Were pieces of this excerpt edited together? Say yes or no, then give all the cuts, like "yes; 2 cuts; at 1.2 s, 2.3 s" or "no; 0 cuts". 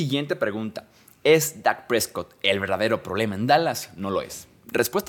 no; 0 cuts